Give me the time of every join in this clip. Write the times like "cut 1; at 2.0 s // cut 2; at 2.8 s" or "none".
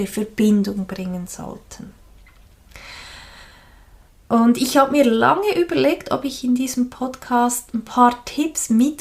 none

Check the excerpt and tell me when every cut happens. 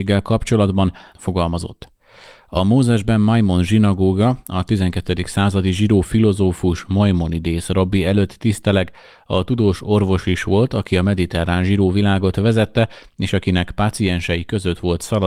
cut 1; at 1.1 s

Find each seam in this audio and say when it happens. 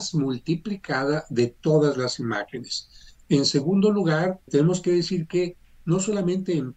cut 1; at 3.2 s // cut 2; at 4.5 s

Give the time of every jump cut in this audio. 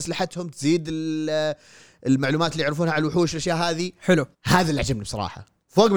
cut 1; at 4.3 s

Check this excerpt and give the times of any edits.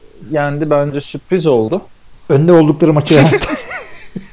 cut 1; at 2.2 s

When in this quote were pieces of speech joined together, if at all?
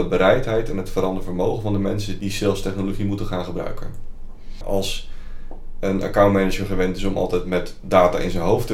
cut 1; at 2.2 s // cut 2; at 4.6 s

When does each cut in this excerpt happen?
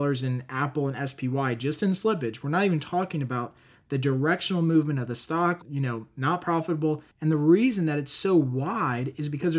cut 1; at 5.6 s // cut 2; at 7.1 s

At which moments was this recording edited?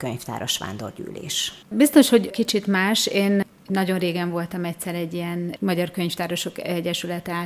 cut 1; at 1.6 s

